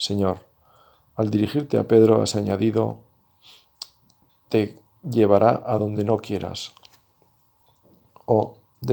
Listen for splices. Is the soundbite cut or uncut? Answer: uncut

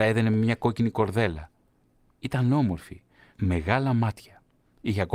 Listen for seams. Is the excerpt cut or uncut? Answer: cut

